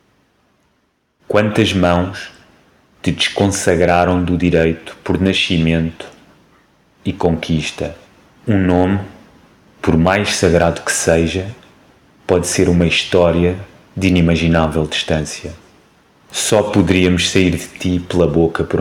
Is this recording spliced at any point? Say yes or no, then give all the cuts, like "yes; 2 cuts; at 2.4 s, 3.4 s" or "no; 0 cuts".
no; 0 cuts